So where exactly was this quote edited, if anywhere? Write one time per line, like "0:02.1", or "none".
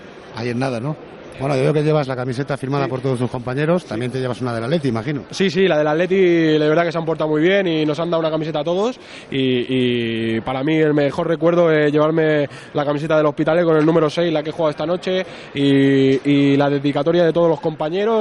0:01.3